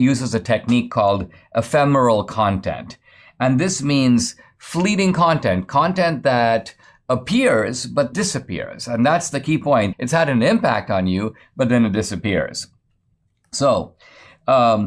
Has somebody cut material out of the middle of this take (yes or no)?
yes